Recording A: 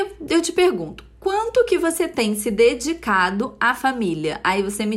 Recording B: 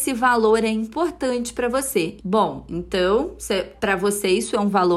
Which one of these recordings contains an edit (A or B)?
B